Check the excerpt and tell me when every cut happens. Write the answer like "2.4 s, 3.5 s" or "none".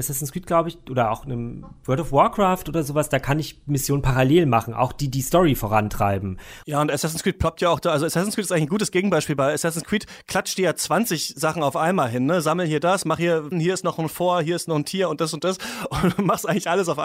6.6 s, 13.5 s